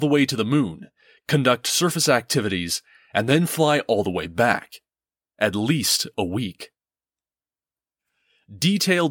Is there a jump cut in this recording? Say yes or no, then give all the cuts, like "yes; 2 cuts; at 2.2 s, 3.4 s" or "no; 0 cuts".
no; 0 cuts